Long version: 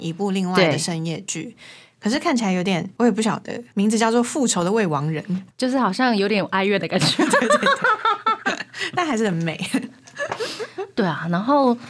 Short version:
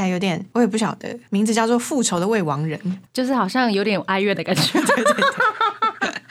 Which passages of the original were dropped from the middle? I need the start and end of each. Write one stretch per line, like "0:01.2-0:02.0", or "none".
none